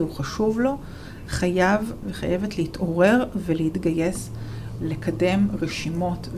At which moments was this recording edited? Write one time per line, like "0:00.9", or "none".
none